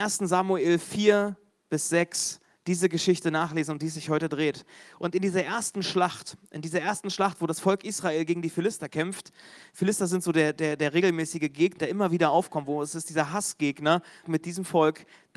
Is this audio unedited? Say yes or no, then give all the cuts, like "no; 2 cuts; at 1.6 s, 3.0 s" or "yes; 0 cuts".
no; 2 cuts; at 11.8 s, 14.2 s